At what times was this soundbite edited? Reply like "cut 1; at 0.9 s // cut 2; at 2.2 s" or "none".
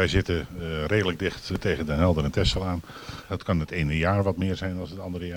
cut 1; at 3.3 s